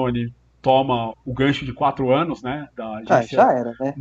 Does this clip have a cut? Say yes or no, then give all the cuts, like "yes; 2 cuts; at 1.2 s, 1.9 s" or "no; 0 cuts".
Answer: yes; 1 cut; at 1.1 s